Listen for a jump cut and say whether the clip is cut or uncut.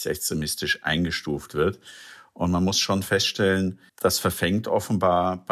cut